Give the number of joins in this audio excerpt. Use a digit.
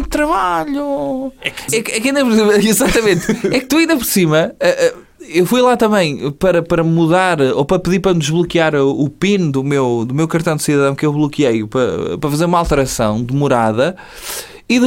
1